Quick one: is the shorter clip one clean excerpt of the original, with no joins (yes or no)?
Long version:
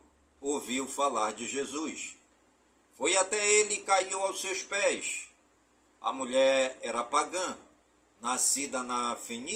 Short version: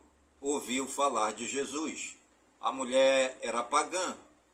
no